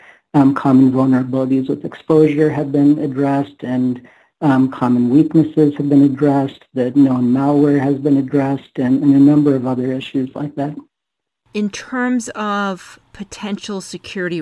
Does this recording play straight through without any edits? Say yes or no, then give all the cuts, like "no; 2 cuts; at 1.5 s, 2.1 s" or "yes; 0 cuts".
yes; 0 cuts